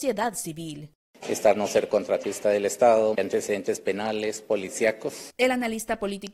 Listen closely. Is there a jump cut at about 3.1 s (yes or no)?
yes